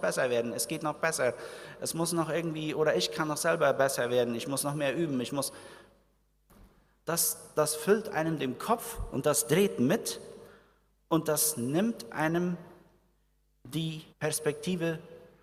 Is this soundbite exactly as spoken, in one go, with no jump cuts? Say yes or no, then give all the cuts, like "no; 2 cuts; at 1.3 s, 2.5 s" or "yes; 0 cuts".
no; 1 cut; at 14.1 s